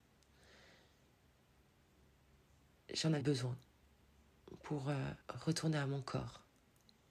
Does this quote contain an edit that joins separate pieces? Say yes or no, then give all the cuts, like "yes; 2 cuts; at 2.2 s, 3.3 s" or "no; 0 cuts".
yes; 2 cuts; at 3.2 s, 5.2 s